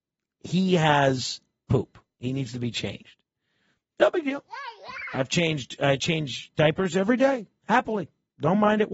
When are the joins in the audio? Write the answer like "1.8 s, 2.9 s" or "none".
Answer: none